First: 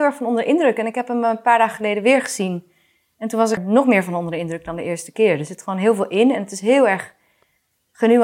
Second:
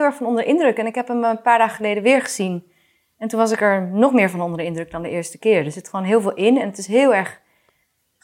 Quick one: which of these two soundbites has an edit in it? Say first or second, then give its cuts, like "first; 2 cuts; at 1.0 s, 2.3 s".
first; 1 cut; at 3.6 s